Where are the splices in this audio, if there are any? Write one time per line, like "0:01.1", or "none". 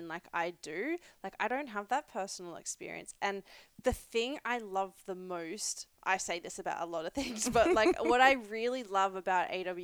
none